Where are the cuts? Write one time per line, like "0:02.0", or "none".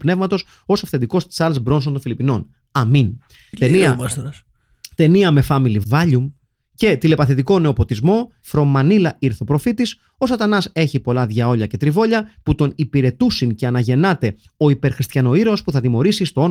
0:05.8
0:08.4